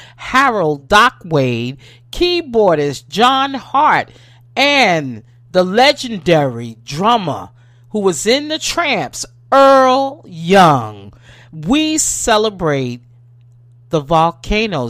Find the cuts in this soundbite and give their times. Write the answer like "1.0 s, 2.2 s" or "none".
none